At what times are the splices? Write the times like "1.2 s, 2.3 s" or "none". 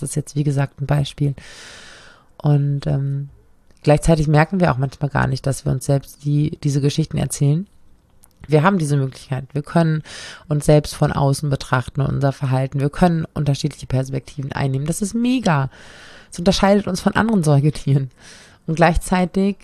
8.5 s